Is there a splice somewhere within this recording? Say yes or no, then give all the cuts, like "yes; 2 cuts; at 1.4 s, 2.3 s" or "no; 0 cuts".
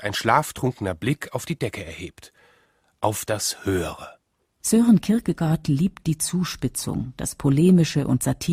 no; 0 cuts